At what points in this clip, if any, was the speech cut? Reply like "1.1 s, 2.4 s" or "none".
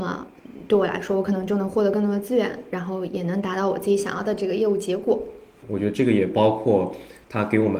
5.6 s